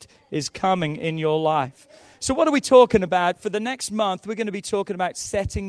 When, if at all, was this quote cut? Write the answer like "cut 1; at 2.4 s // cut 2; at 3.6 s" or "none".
none